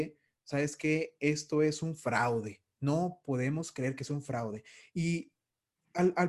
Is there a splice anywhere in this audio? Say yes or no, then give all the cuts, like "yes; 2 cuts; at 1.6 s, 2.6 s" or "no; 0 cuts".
no; 0 cuts